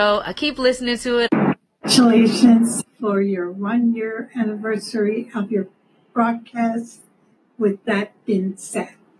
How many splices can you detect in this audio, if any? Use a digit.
2